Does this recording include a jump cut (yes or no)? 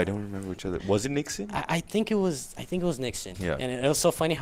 yes